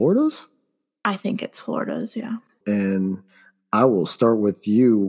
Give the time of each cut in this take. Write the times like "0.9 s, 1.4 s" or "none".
2.6 s

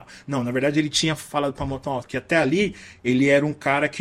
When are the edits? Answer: 2.0 s

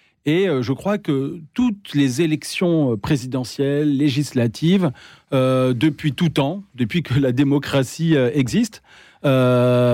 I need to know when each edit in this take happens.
none

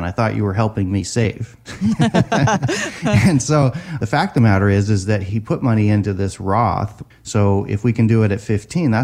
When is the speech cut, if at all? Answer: 7.1 s

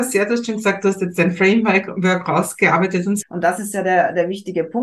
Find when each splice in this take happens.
3.2 s

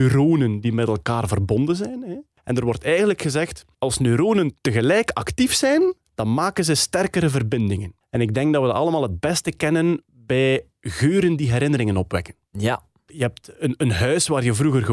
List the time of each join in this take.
none

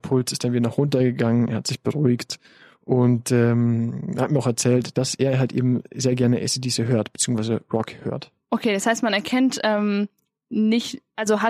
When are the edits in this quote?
4.9 s, 8.4 s

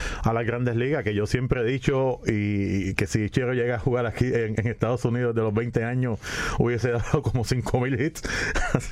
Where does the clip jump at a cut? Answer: 4.6 s

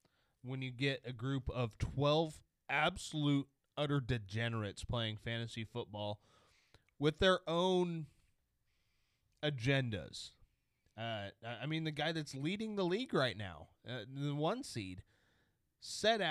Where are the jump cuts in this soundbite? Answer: none

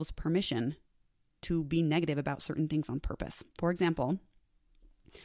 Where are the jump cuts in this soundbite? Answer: 3.5 s

